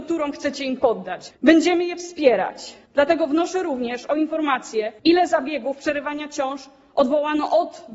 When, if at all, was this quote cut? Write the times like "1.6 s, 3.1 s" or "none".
1.3 s